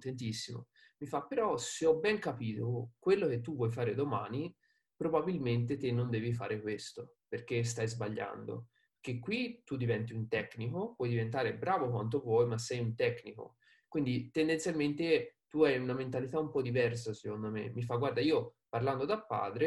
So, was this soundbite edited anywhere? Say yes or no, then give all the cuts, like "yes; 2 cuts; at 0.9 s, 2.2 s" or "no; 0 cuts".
yes; 1 cut; at 13.8 s